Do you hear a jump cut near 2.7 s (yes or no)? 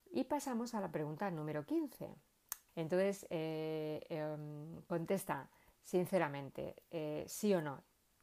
yes